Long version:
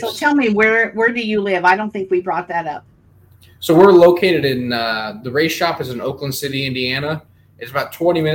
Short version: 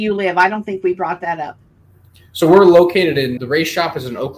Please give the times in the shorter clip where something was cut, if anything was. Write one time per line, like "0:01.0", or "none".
0:03.4